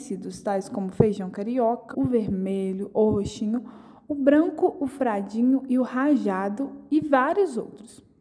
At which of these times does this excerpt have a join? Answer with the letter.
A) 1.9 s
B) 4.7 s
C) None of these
A